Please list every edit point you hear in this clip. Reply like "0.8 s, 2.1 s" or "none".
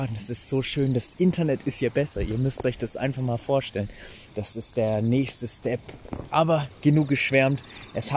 4.3 s, 6.3 s